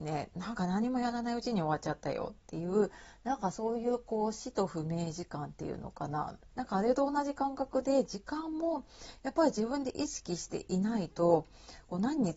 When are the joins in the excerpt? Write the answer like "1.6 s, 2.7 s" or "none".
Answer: 6.5 s